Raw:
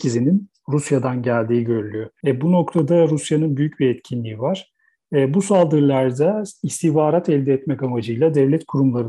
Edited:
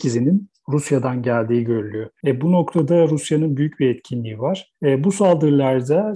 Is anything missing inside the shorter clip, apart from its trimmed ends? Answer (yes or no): yes